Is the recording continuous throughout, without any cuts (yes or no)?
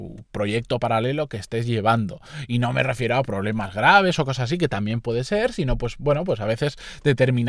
yes